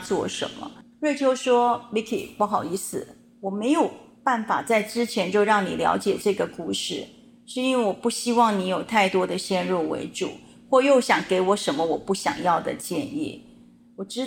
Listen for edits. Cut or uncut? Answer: uncut